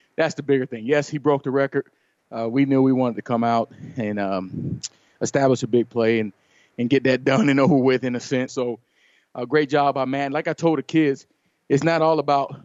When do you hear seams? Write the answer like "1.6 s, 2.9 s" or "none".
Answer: 2.2 s, 8.5 s

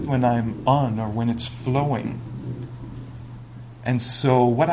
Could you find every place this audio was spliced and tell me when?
none

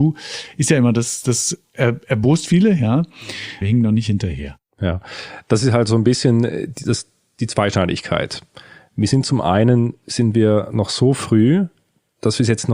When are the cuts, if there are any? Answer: 3.6 s

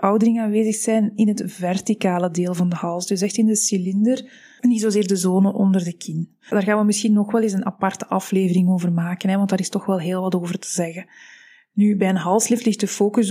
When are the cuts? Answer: 4.6 s

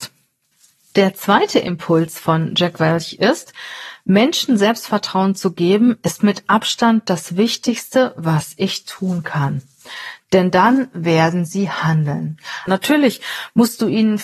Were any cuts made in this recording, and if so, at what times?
12.7 s

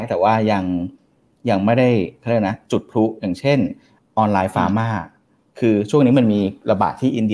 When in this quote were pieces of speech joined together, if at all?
4.0 s

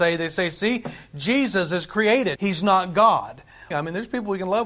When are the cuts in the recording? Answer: 2.4 s, 3.7 s

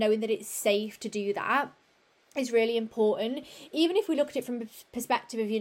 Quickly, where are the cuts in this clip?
none

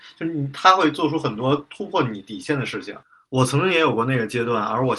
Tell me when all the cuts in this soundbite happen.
none

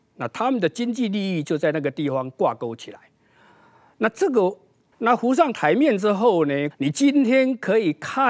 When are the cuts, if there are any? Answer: 4.9 s, 6.7 s

